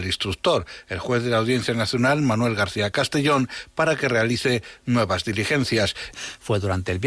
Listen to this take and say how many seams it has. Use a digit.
1